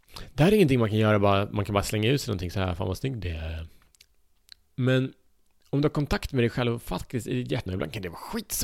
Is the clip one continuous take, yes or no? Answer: no